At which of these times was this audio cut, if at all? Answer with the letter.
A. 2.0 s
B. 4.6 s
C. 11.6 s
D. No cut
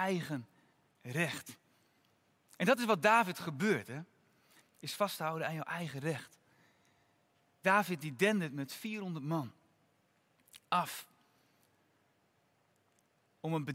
B